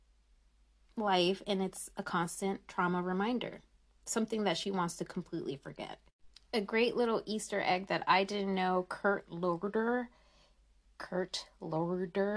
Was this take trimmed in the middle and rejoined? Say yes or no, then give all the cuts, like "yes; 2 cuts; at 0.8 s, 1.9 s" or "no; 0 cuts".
no; 0 cuts